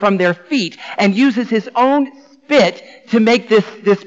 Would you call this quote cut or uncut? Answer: uncut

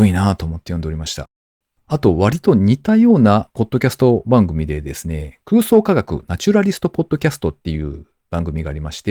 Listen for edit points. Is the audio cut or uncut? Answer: uncut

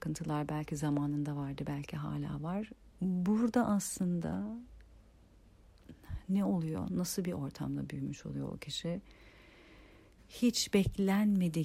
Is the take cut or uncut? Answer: cut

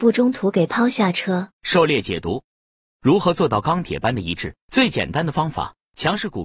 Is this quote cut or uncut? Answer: cut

